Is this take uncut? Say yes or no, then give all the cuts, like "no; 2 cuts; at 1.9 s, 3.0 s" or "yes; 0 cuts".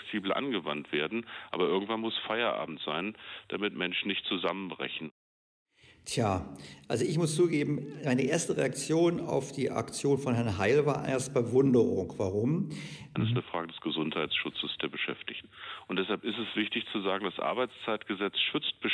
no; 1 cut; at 13.2 s